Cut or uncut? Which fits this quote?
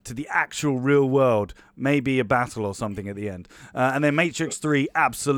uncut